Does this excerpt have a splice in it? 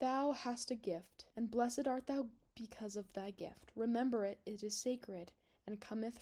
yes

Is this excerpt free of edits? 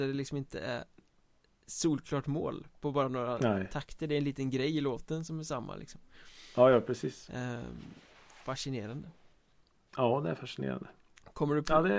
yes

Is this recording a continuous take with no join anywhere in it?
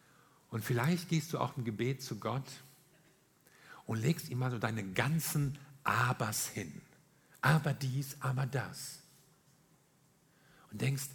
yes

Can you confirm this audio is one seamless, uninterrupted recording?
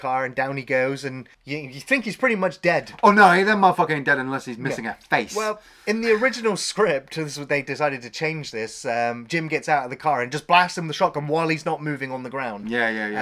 no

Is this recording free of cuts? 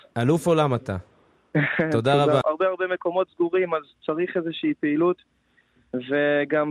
no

